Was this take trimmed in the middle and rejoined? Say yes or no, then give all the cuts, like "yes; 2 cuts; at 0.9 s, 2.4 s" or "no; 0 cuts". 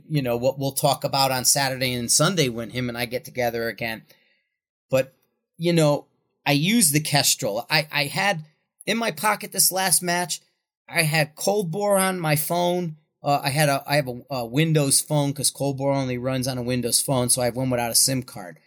no; 0 cuts